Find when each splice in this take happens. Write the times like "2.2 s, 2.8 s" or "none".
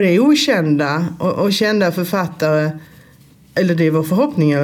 none